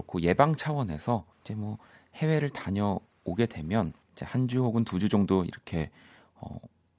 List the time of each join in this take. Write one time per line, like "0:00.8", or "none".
0:01.3
0:04.0